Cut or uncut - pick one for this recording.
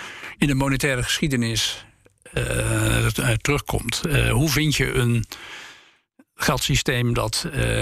uncut